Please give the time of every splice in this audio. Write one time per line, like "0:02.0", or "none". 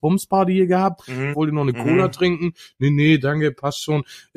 0:01.3